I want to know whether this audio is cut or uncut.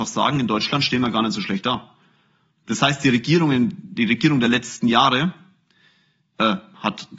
uncut